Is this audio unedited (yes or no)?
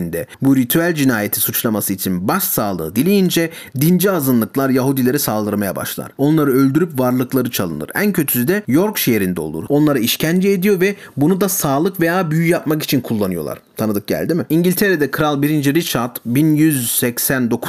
no